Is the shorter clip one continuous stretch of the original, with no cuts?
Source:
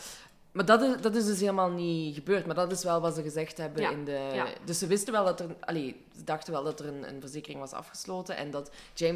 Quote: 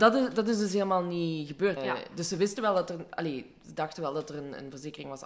no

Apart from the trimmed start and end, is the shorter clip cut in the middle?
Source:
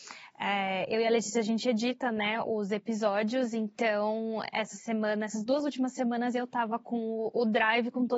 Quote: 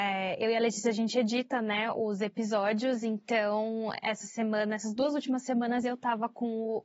no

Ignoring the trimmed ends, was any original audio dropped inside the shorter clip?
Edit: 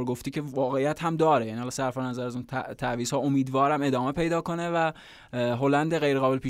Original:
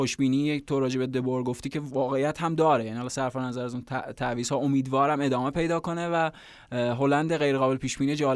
no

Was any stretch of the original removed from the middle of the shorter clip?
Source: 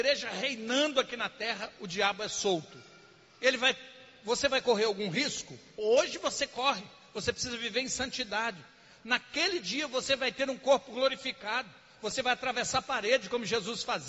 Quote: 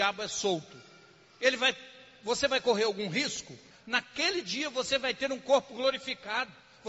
yes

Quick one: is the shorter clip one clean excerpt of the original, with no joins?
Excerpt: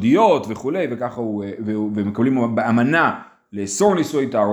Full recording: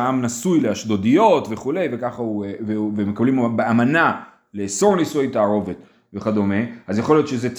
yes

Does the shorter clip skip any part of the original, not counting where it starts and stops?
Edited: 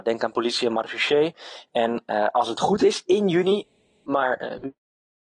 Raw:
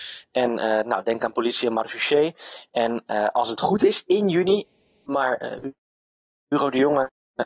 no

